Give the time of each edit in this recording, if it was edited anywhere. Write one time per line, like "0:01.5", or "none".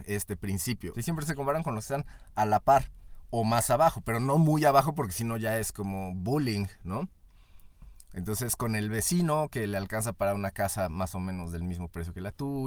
0:00.9